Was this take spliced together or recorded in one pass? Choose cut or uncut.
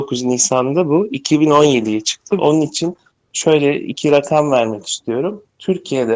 cut